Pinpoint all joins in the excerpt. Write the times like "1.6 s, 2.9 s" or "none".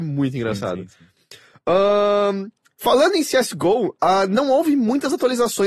none